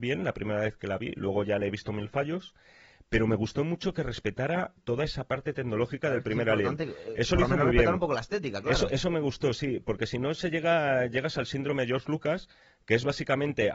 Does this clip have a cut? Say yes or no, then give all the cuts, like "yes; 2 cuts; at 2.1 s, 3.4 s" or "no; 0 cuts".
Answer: yes; 1 cut; at 4.8 s